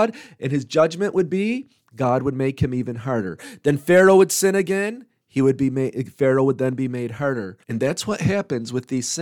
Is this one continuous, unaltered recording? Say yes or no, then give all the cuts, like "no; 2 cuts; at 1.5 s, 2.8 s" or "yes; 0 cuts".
no; 1 cut; at 7.6 s